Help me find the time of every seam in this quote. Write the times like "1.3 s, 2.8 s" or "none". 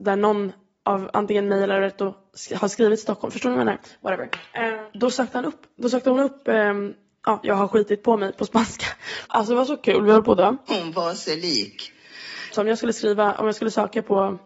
9.2 s, 10.7 s, 12.5 s